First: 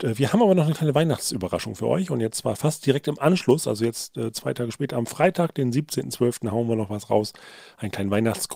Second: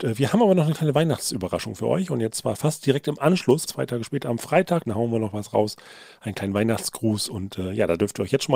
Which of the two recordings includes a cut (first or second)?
second